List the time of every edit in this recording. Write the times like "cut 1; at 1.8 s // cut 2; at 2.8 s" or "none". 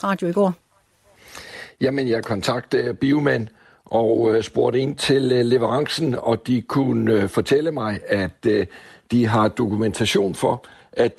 none